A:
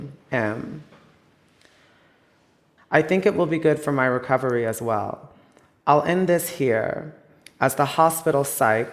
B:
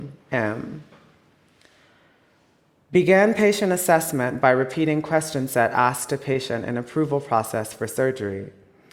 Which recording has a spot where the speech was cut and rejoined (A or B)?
A